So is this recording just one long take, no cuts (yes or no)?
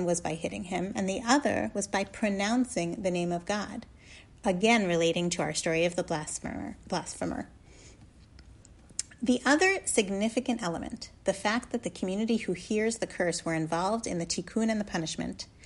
yes